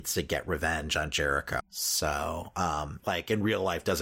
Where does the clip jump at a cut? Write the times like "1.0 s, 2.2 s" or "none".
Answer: 1.6 s, 3.0 s